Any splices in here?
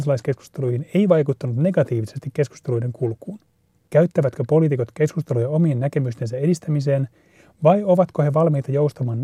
yes; 1 cut; at 3.9 s

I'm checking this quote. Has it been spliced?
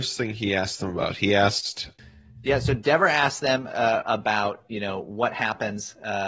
yes; 1 cut; at 4.0 s

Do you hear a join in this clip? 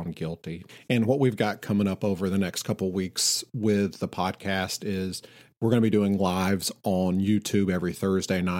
no; 0 cuts

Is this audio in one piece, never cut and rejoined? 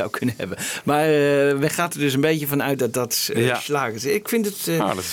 yes; 0 cuts

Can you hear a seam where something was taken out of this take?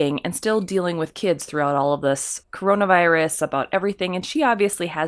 yes; 1 cut; at 2.4 s

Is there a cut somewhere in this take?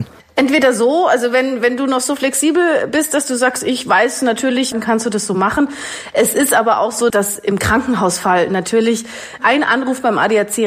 yes; 2 cuts; at 4.7 s, 7.1 s

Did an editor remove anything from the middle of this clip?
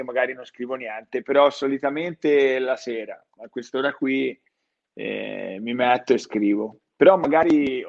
no; 0 cuts

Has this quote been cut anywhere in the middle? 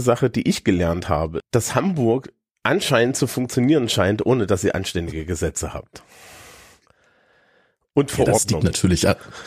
yes; 1 cut; at 1.4 s

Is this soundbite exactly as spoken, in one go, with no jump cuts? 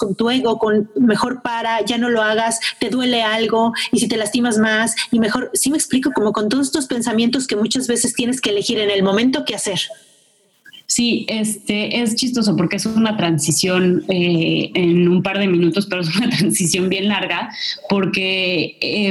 no; 1 cut; at 14.7 s

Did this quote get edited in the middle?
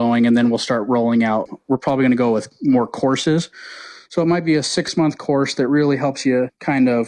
no; 0 cuts

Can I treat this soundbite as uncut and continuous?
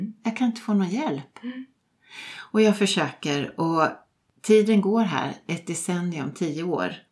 yes; 0 cuts

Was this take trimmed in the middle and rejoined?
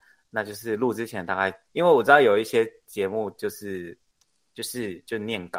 yes; 1 cut; at 1.7 s

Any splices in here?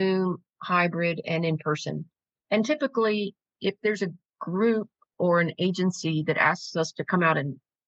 no; 0 cuts

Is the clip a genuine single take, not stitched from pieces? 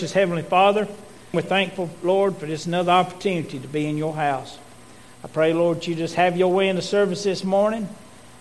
no; 1 cut; at 1.3 s

